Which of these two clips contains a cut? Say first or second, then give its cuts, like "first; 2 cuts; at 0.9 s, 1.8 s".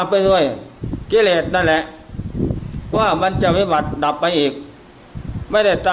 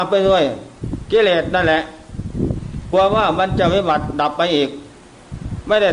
first; 1 cut; at 2.9 s